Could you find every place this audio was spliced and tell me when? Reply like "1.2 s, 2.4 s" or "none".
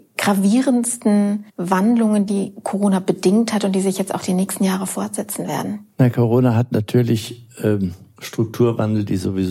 2.3 s